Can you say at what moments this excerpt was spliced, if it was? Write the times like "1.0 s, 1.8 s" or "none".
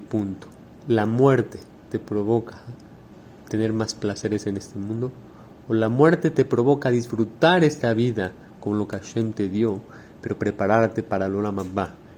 none